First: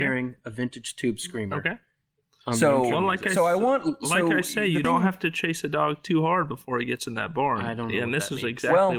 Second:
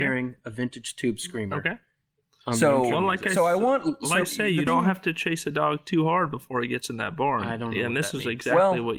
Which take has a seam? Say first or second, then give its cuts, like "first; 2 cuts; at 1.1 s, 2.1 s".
second; 1 cut; at 4.2 s